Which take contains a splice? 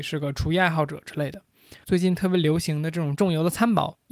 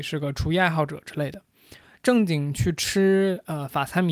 first; 1 cut; at 1.8 s

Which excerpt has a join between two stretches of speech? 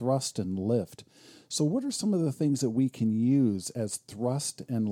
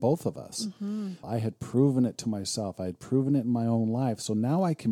second; 1 cut; at 1.2 s

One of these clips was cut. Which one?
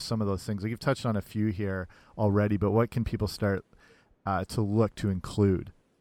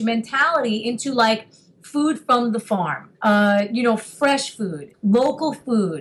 second; 2 cuts; at 3.1 s, 4.9 s

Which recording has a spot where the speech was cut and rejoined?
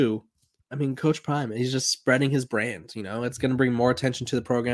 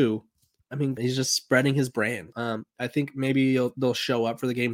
second; 2 cuts; at 1.0 s, 2.3 s

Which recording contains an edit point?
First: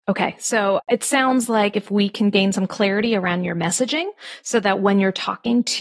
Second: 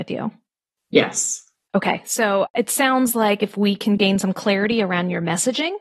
second; 1 cut; at 1.7 s

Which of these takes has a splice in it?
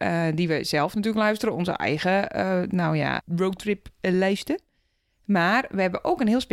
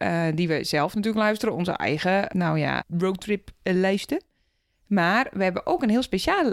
second; 1 cut; at 2.3 s

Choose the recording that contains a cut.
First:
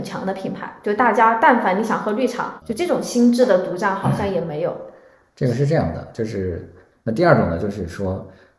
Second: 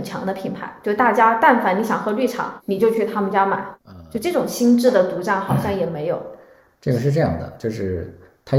first; 2 cuts; at 2.6 s, 6.9 s

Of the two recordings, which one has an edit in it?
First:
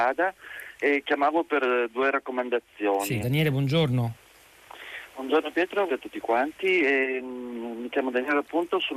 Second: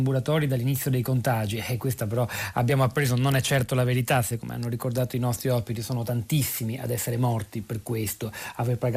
first; 2 cuts; at 3.2 s, 5.9 s

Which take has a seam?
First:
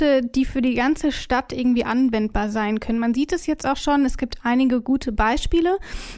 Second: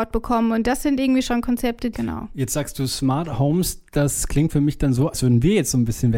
second; 1 cut; at 1.9 s

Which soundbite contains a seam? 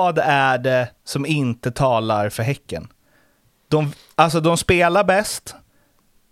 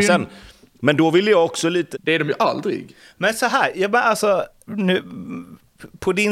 second; 2 cuts; at 1.9 s, 4.7 s

